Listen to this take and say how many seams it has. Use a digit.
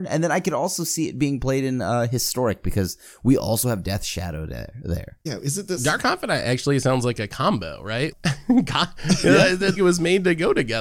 2